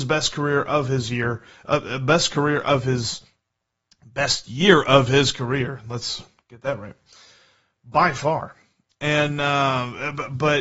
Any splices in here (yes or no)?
no